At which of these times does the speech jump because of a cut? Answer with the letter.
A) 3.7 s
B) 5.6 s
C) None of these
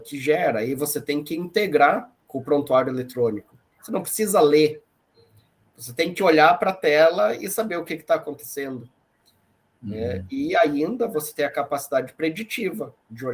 A